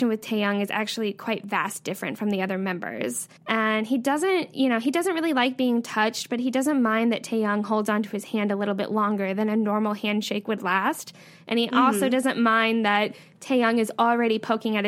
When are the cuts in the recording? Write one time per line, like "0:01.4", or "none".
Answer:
0:03.4